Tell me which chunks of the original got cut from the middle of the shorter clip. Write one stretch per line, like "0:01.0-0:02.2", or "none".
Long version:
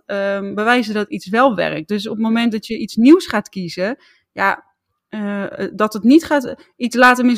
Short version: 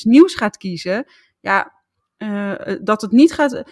none

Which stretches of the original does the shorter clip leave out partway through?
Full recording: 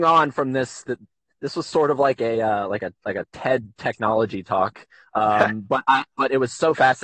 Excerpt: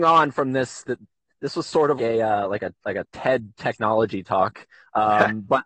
0:02.0-0:02.2

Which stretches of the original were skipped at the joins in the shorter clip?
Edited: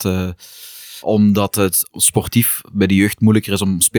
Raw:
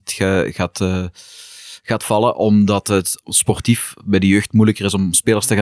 0:01.8-0:02.3

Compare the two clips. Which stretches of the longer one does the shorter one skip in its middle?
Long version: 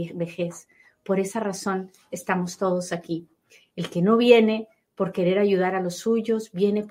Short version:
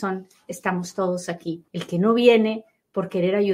0:03.3-0:03.7

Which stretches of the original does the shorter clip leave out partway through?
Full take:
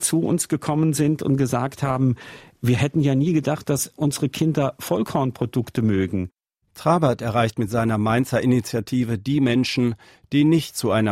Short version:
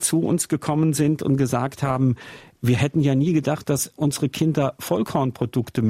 none

